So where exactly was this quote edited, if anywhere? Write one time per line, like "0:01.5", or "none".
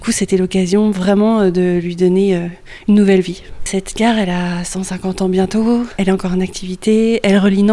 none

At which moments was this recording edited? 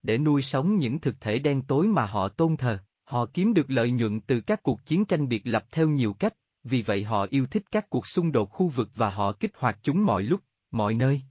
0:02.9

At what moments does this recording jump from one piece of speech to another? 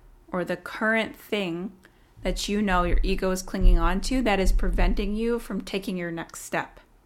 none

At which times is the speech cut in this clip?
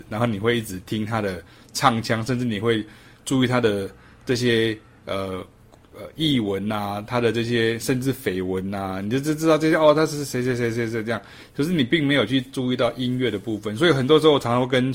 none

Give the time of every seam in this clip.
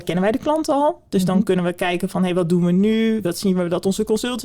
none

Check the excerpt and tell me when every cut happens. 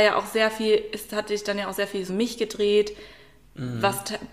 0:02.1

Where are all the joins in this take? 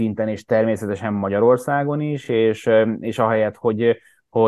none

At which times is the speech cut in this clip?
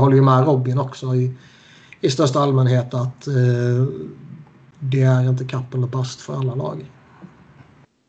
none

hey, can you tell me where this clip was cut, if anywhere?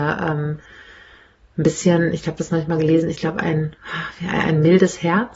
none

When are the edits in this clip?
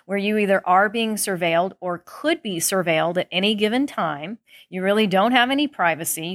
none

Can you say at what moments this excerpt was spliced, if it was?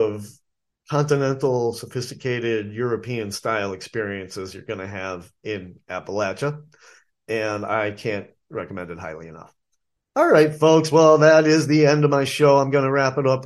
none

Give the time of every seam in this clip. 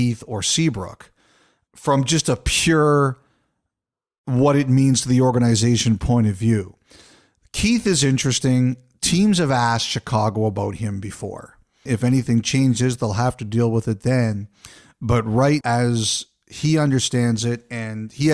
0:11.9
0:15.6

